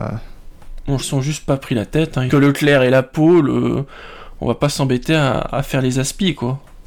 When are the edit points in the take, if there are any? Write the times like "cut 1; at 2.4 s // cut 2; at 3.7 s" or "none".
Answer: cut 1; at 1.0 s // cut 2; at 2.3 s